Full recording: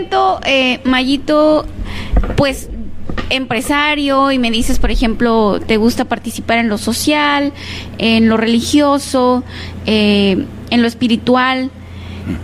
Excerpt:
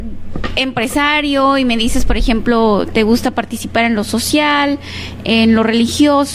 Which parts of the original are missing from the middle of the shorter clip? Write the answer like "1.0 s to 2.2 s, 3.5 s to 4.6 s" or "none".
none